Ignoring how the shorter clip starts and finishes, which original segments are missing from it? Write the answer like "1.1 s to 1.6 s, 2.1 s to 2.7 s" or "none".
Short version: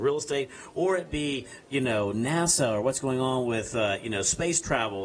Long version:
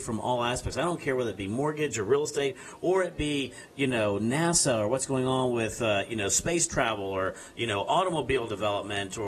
none